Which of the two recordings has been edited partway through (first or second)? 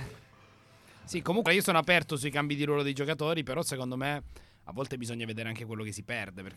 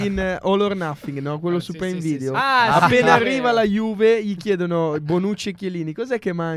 first